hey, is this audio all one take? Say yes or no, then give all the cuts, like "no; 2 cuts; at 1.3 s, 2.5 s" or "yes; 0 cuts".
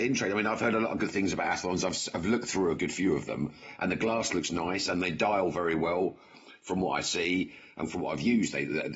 yes; 0 cuts